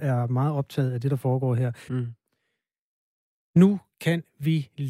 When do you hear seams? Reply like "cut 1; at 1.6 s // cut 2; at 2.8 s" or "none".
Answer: cut 1; at 1.9 s